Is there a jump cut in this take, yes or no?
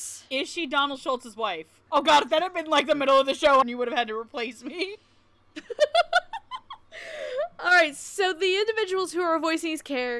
yes